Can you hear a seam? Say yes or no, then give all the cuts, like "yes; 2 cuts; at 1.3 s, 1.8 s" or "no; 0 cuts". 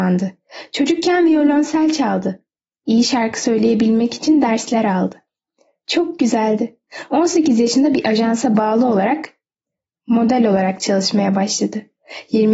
no; 0 cuts